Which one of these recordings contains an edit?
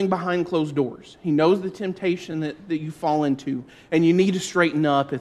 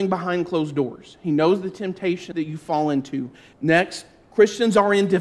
second; 2 cuts; at 2.3 s, 3.5 s

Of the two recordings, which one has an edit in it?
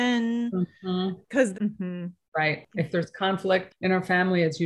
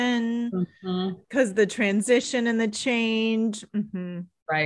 first; 1 cut; at 1.5 s

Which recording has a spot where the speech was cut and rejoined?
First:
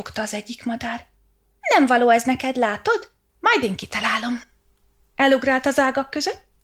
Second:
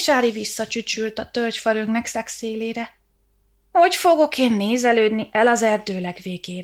first; 1 cut; at 3.3 s

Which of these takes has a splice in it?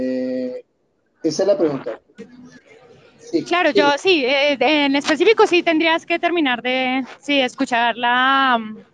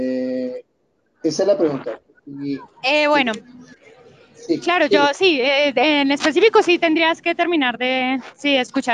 first; 1 cut; at 2.2 s

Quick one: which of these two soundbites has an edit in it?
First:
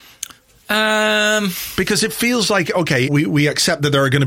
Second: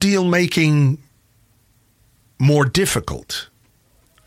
first; 1 cut; at 3.1 s

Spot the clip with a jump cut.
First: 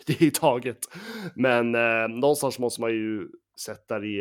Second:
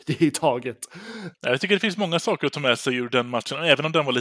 second; 1 cut; at 1.3 s

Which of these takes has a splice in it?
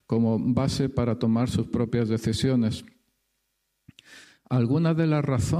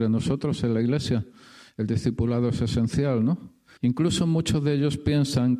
second; 1 cut; at 3.8 s

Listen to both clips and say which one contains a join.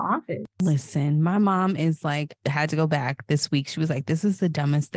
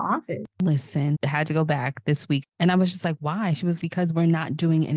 second; 3 cuts; at 1.1 s, 2.4 s, 3.8 s

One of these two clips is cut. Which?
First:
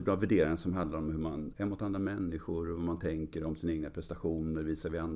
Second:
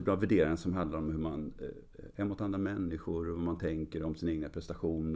first; 1 cut; at 1.5 s

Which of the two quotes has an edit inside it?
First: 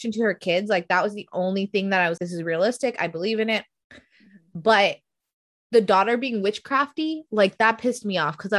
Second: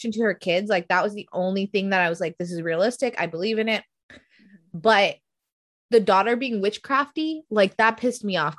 first; 1 cut; at 2.2 s

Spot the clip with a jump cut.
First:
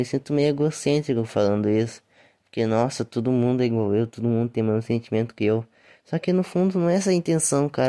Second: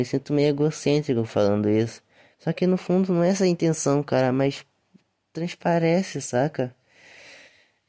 second; 1 cut; at 2.3 s

